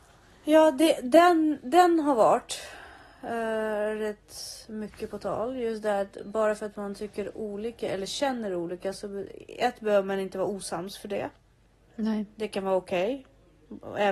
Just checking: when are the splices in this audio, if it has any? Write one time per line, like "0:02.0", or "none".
none